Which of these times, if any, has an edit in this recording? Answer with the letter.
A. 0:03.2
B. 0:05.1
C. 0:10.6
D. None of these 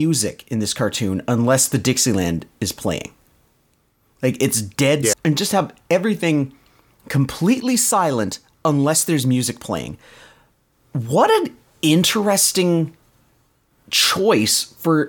B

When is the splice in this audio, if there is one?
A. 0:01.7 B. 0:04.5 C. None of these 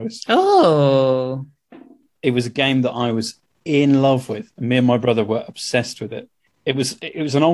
C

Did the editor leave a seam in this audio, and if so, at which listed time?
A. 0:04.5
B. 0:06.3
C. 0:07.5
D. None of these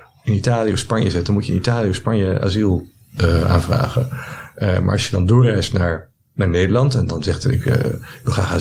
C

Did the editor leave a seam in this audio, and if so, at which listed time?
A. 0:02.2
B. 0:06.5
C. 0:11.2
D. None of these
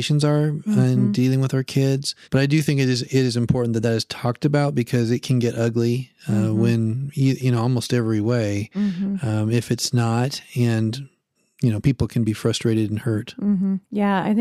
A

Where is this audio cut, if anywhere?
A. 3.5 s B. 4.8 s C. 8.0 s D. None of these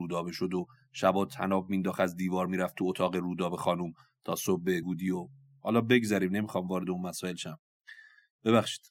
B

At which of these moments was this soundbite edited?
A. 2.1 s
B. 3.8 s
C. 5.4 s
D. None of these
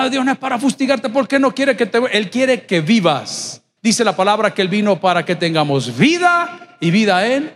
B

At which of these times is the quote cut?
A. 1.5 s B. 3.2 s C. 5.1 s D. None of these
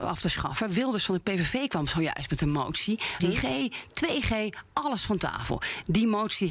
B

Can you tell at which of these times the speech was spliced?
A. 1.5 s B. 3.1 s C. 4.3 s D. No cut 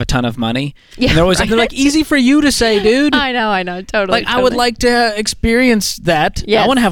A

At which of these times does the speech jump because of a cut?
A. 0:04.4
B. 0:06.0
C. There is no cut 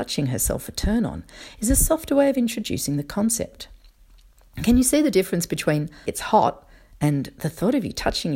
B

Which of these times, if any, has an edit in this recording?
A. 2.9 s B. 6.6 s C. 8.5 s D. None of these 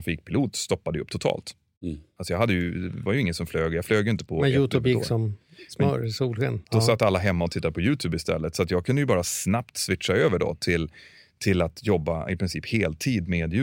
B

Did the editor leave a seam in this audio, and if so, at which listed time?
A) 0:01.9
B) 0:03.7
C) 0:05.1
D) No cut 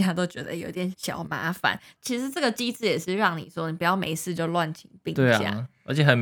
D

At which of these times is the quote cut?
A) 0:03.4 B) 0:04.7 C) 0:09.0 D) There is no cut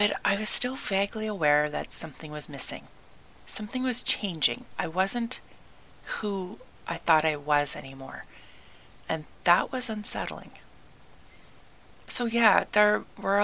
D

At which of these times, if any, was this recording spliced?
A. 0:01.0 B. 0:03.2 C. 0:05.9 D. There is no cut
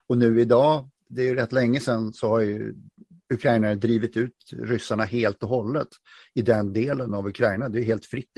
D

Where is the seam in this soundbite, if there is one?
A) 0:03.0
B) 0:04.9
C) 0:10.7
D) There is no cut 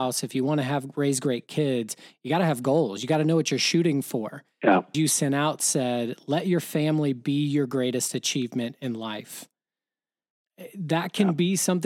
B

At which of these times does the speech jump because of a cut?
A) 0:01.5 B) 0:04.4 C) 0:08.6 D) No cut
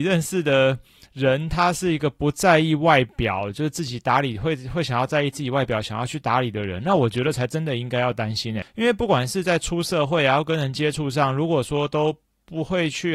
C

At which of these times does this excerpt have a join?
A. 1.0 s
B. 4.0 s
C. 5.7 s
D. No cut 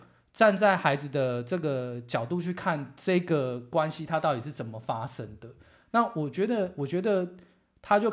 D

